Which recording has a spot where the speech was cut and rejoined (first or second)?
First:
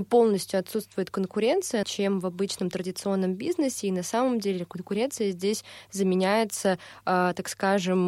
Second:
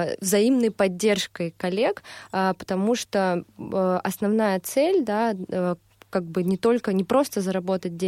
first